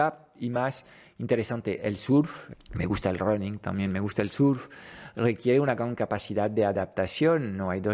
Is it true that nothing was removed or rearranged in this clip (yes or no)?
no